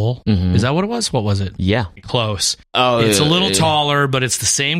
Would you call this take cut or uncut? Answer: cut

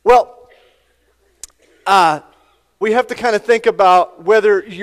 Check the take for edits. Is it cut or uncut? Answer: cut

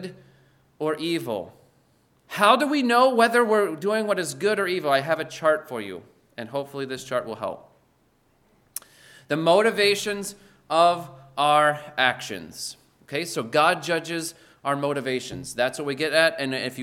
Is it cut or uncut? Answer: uncut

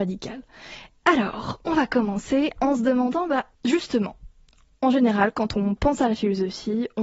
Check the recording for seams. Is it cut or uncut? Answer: cut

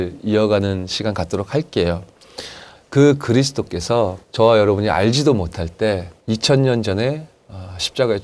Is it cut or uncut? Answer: cut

